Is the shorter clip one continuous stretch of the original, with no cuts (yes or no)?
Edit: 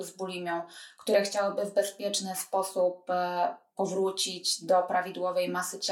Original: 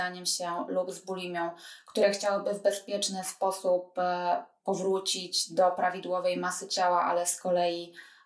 yes